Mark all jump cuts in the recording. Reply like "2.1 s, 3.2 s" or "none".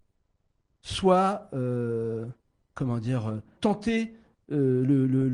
3.6 s